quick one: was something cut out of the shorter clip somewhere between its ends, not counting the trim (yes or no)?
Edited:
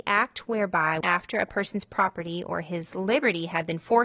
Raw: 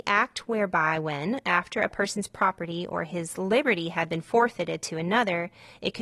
yes